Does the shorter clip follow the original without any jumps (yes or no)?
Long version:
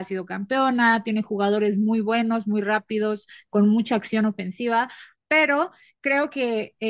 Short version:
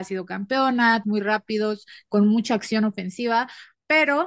no